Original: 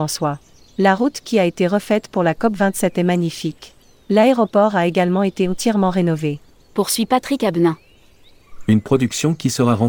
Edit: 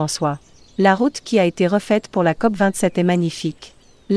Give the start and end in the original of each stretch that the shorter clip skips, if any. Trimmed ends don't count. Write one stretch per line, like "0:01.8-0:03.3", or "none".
none